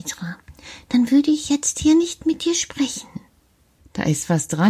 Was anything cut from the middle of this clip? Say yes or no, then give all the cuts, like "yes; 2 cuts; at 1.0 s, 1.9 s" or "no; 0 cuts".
yes; 1 cut; at 3.8 s